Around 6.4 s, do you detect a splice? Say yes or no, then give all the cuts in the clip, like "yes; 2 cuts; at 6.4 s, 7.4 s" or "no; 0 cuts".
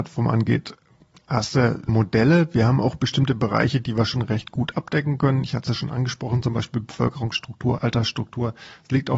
no; 1 cut; at 1.9 s